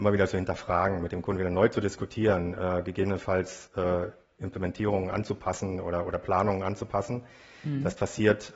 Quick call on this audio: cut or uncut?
uncut